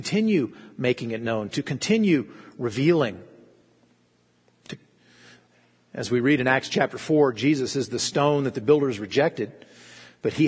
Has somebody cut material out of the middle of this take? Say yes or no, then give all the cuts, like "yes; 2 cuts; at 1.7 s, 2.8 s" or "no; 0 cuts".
no; 0 cuts